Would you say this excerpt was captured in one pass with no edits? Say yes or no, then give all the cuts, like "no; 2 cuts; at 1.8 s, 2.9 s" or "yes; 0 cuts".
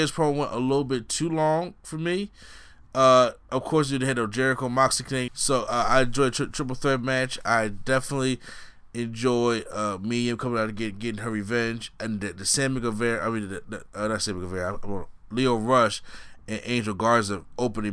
no; 2 cuts; at 3.4 s, 5.3 s